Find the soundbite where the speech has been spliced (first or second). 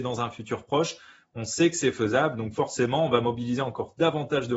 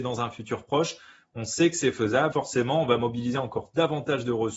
second